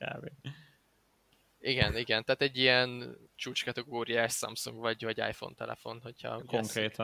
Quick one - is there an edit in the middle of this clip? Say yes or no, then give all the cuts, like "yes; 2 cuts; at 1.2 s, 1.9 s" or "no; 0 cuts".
yes; 1 cut; at 3.3 s